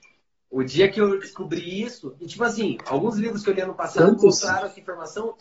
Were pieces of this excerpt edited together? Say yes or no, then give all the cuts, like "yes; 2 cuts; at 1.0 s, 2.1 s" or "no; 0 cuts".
no; 0 cuts